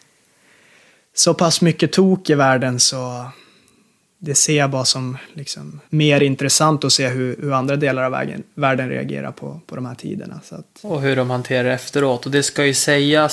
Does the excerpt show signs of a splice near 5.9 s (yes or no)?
yes